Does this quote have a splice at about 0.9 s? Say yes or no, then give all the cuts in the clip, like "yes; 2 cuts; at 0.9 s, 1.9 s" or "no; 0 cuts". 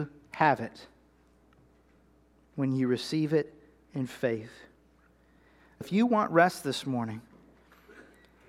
no; 1 cut; at 5.8 s